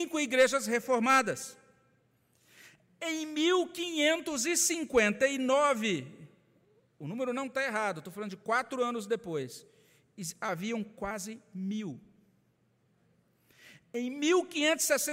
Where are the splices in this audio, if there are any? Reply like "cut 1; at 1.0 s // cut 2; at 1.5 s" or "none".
none

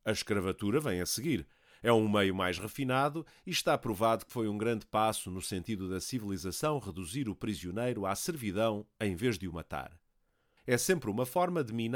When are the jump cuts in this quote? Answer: cut 1; at 10.6 s

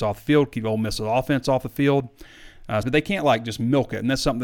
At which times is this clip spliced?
cut 1; at 2.8 s

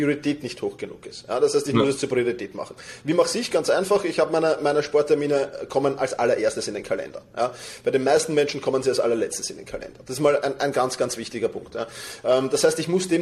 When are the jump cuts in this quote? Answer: none

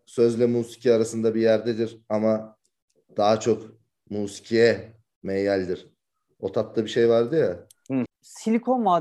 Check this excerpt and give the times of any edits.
cut 1; at 8.1 s

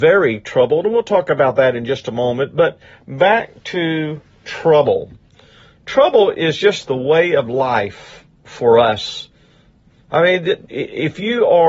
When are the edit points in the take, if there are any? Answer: none

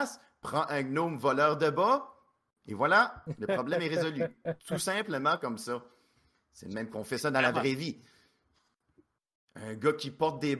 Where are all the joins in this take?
cut 1; at 6.3 s

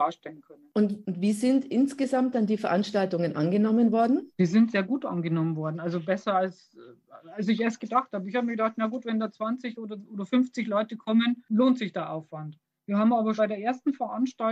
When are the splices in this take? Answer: cut 1; at 13.4 s

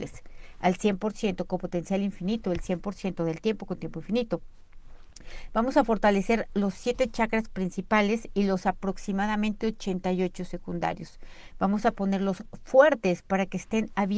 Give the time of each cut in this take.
none

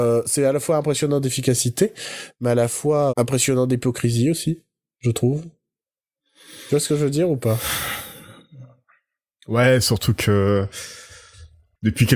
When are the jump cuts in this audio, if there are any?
cut 1; at 3.1 s

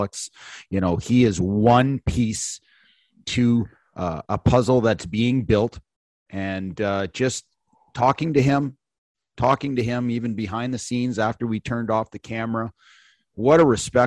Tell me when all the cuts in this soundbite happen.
cut 1; at 3.2 s

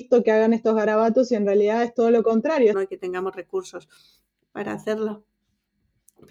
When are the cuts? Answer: cut 1; at 2.7 s

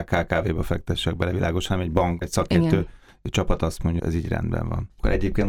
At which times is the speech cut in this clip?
cut 1; at 2.2 s // cut 2; at 4.0 s

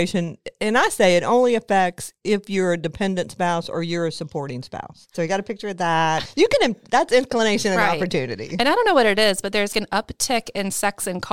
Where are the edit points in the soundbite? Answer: cut 1; at 5.1 s // cut 2; at 9.7 s

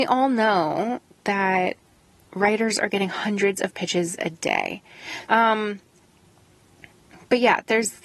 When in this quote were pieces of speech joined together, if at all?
cut 1; at 5.3 s

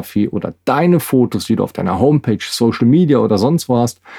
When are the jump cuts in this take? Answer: none

